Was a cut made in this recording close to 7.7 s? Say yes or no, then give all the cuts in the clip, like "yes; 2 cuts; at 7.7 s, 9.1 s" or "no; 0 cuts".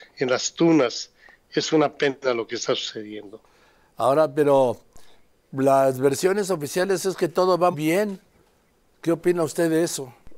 yes; 1 cut; at 7.7 s